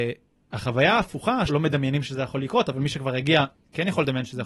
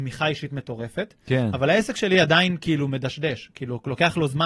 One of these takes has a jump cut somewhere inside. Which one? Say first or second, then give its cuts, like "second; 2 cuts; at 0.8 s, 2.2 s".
first; 1 cut; at 1.5 s